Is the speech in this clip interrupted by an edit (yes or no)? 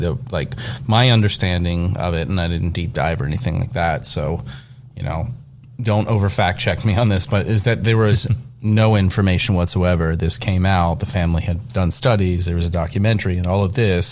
no